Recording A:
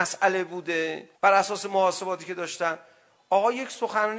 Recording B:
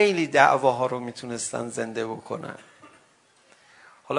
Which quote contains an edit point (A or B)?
A